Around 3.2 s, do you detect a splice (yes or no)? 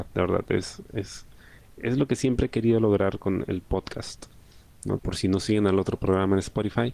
no